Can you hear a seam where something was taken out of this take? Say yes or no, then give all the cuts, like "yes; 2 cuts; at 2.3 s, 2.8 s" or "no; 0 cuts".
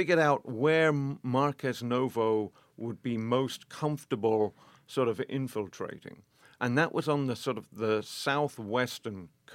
no; 0 cuts